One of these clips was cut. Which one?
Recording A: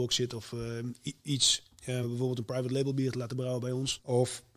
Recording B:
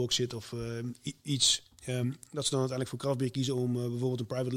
A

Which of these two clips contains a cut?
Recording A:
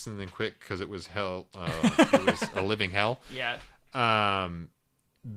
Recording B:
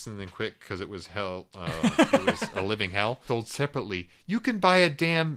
B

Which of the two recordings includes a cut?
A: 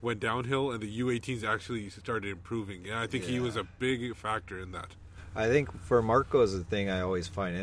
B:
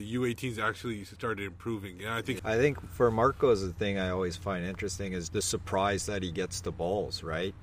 B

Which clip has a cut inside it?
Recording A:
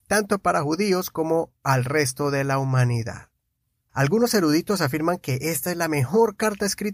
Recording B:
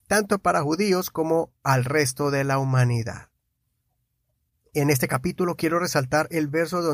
A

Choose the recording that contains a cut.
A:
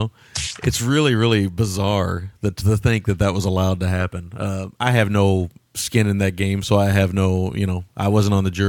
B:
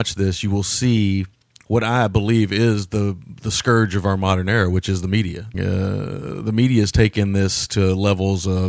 B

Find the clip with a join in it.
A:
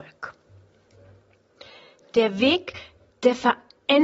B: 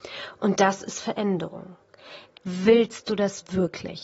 B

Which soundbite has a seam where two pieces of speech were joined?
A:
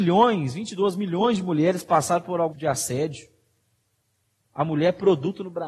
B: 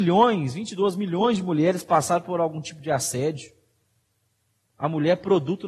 A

